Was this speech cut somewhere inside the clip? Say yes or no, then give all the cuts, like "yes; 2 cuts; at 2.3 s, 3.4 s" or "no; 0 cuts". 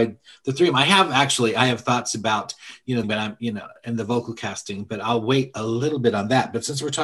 yes; 1 cut; at 3.0 s